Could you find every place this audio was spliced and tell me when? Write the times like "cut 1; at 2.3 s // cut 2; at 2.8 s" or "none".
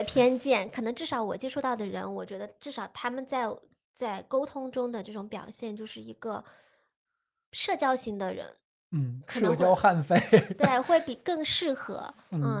none